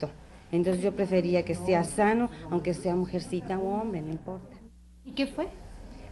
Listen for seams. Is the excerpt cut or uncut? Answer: uncut